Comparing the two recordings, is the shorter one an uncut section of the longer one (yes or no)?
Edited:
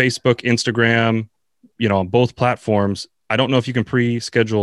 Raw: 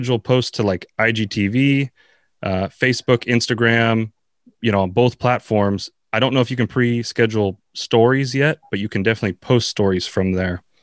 yes